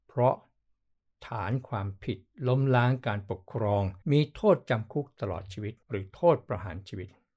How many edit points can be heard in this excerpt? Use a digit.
2